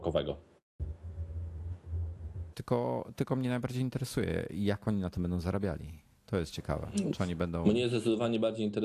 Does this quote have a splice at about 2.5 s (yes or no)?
yes